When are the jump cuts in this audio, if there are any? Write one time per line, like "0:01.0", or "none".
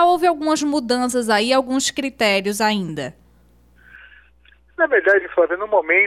none